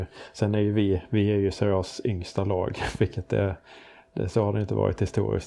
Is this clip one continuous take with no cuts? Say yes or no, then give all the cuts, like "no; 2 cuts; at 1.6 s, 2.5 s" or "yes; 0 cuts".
yes; 0 cuts